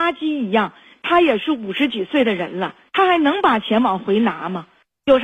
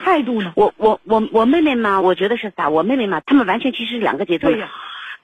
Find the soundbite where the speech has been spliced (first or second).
second